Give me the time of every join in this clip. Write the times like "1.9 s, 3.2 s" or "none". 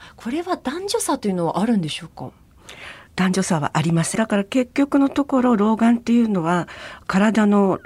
4.2 s